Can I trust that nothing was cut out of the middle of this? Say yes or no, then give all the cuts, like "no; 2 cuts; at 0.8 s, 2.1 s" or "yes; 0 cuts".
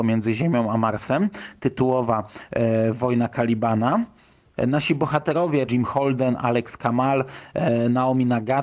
no; 1 cut; at 5.7 s